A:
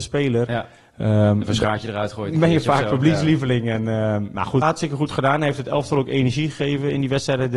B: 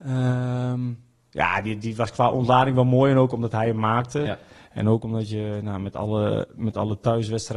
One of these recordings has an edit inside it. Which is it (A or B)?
A